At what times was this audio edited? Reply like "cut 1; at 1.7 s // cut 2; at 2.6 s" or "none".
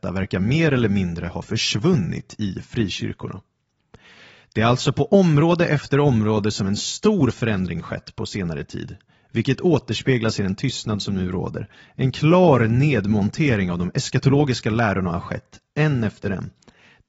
none